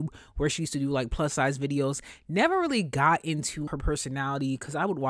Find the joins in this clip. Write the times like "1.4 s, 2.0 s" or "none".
3.7 s